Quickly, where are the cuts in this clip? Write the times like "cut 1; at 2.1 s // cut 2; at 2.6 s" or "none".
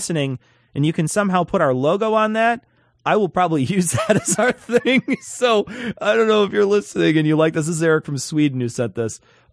none